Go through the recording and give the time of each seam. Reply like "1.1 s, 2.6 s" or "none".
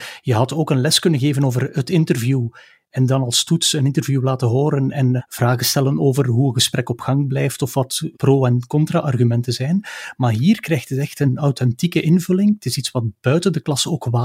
5.2 s